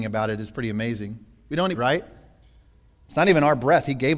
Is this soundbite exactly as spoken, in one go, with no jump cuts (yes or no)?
no